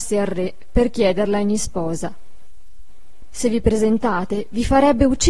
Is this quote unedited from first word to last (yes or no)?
no